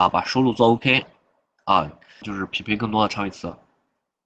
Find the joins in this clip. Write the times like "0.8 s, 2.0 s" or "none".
2.2 s